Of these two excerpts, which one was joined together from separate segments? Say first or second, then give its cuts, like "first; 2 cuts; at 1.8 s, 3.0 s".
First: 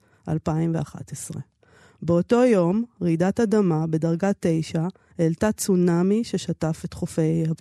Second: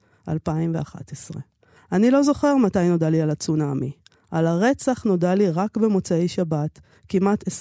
second; 1 cut; at 1.8 s